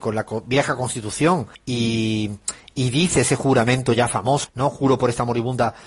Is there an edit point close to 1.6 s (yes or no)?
yes